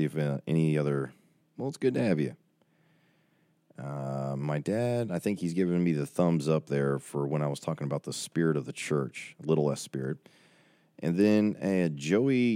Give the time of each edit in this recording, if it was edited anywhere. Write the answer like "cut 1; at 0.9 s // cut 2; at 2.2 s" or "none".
cut 1; at 1.4 s